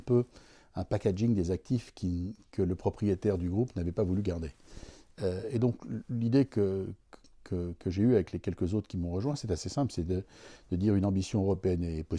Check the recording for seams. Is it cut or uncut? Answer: uncut